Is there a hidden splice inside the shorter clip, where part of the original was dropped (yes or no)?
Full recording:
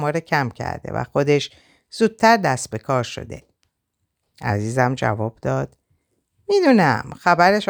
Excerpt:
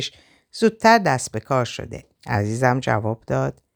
yes